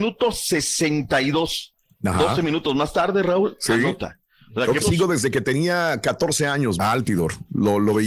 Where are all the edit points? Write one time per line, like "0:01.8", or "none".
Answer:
0:04.8
0:06.8